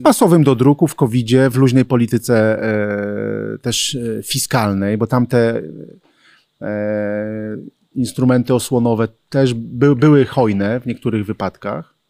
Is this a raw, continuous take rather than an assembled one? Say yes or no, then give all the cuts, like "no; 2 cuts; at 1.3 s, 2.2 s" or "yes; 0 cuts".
yes; 0 cuts